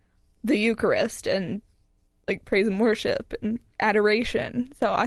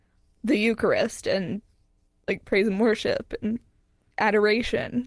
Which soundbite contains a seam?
first; 1 cut; at 3.7 s

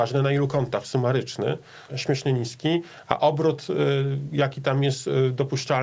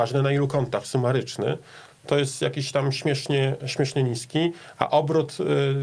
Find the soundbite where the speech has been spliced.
first; 1 cut; at 1.9 s

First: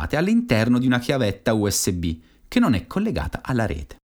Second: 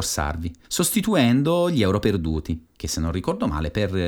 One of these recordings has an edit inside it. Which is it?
second; 1 cut; at 2.7 s

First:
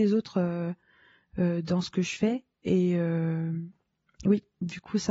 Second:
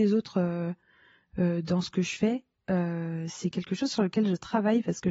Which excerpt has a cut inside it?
second; 1 cut; at 2.6 s

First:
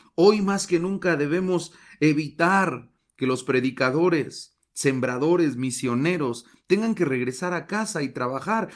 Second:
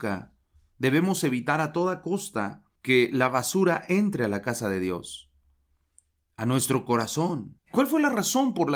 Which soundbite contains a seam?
second; 2 cuts; at 2.8 s, 7.6 s

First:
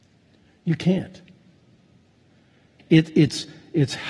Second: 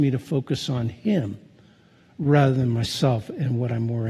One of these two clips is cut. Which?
first; 1 cut; at 2.8 s

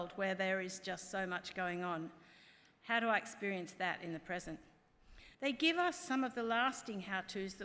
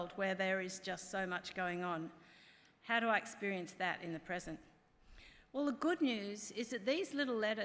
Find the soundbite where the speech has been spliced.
first; 1 cut; at 5.3 s

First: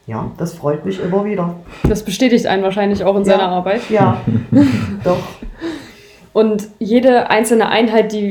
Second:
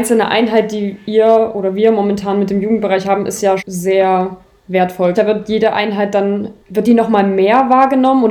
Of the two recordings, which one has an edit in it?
second; 3 cuts; at 3.6 s, 5.1 s, 6.6 s

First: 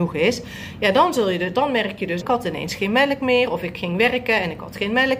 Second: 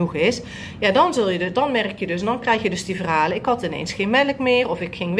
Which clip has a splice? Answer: first; 1 cut; at 2.2 s

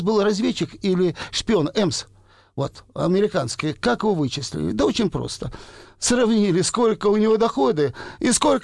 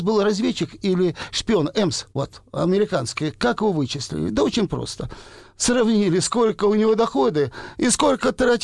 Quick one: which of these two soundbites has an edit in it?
second; 1 cut; at 2.1 s

